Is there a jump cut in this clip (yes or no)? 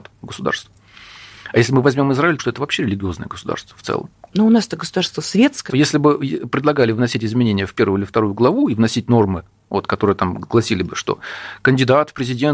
yes